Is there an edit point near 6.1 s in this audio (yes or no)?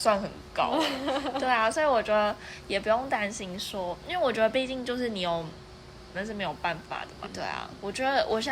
yes